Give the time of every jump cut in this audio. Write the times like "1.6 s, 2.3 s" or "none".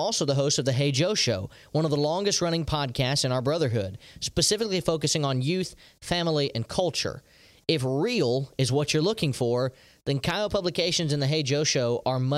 none